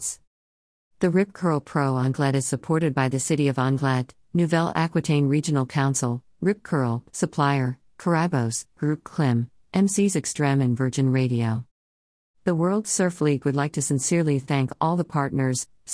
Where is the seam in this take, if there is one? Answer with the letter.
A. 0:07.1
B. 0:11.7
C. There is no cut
A